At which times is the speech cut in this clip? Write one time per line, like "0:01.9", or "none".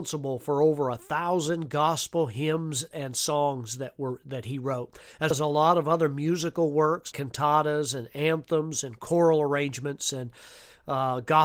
0:02.9
0:05.3
0:07.1